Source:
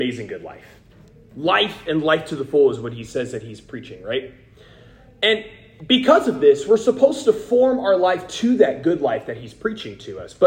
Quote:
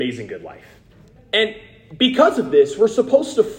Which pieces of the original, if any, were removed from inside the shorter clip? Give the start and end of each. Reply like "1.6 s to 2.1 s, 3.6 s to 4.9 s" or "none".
1.2 s to 5.1 s